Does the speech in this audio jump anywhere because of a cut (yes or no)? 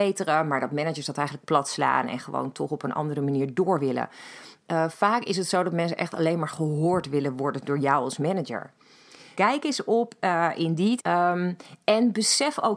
yes